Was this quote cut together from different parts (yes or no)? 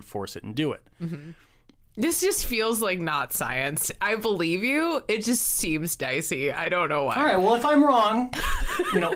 no